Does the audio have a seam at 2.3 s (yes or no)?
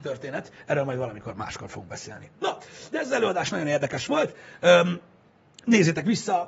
no